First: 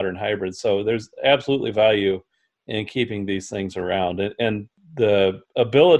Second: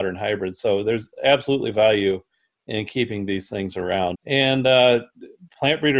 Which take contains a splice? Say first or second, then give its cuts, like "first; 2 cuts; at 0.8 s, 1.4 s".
second; 1 cut; at 4.1 s